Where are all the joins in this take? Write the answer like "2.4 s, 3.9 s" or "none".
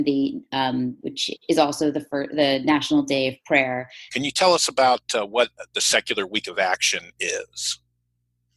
1.0 s, 4.1 s